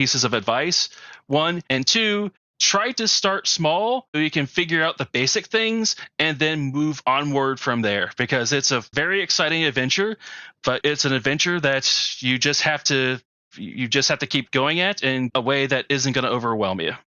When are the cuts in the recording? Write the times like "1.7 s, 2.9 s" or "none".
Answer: 1.7 s, 4.1 s